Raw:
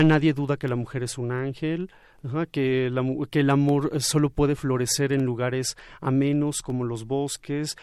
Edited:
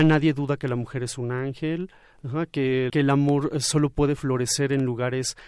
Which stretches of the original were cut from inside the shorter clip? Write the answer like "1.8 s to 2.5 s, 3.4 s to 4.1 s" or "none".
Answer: 2.9 s to 3.3 s